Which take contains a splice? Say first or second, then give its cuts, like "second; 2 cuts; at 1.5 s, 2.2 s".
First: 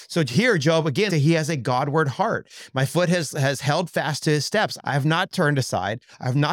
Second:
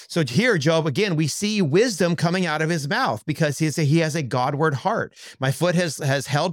first; 2 cuts; at 1.1 s, 4.8 s